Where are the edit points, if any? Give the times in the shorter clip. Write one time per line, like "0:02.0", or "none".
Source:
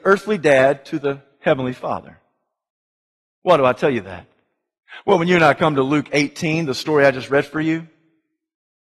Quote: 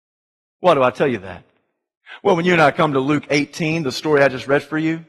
none